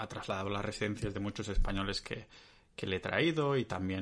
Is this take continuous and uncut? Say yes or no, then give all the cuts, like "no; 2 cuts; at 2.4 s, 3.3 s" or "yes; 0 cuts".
yes; 0 cuts